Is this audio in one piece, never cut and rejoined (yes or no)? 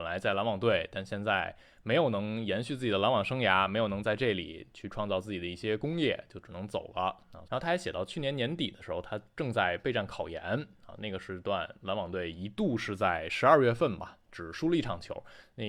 no